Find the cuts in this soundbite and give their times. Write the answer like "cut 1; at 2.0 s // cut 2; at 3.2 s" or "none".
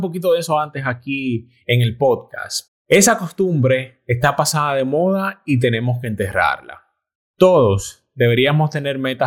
cut 1; at 2.7 s